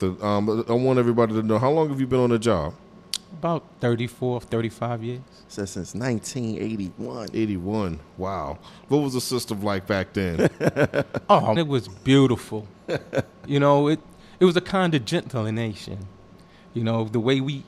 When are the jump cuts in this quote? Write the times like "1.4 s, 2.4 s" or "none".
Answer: 11.6 s